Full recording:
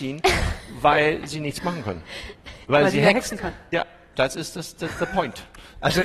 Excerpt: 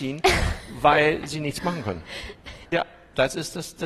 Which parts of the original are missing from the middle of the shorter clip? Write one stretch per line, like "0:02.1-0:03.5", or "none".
0:02.7-0:03.7